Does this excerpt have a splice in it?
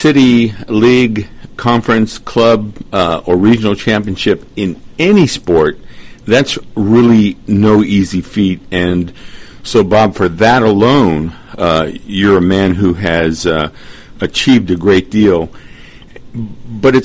no; 0 cuts

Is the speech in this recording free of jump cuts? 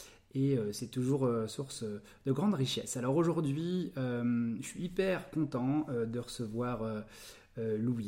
yes; 0 cuts

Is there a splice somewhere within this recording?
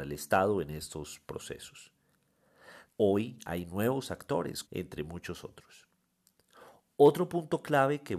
yes; 2 cuts; at 2.9 s, 4.6 s

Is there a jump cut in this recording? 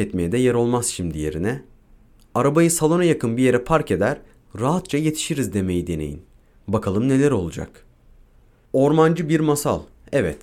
yes; 1 cut; at 8.6 s

